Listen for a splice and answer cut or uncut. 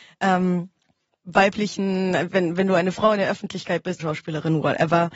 cut